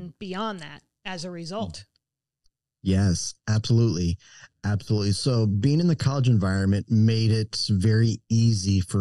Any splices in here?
no; 0 cuts

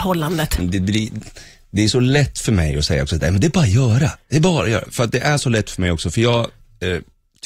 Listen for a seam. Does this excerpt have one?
yes; 1 cut; at 4.8 s

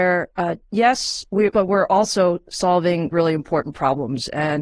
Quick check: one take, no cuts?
no; 2 cuts; at 1.5 s, 3.1 s

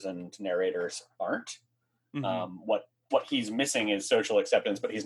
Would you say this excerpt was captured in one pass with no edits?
yes; 0 cuts

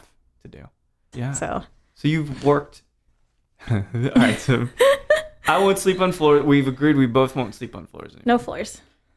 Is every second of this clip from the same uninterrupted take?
no; 1 cut; at 1.1 s

